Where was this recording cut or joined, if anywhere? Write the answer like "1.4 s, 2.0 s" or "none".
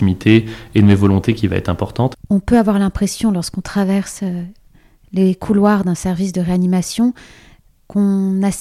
2.1 s